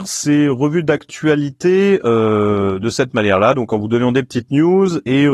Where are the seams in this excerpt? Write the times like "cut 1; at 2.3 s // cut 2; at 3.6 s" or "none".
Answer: none